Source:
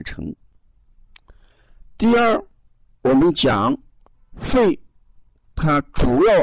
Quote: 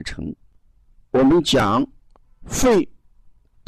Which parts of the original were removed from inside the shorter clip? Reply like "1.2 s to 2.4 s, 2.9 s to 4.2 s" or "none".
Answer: 1.0 s to 2.9 s